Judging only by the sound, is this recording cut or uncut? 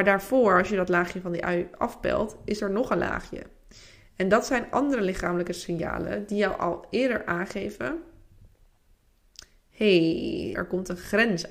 cut